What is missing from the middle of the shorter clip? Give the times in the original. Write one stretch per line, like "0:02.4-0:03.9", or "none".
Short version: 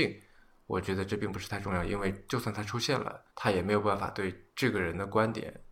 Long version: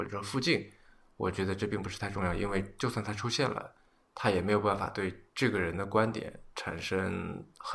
0:03.8-0:04.1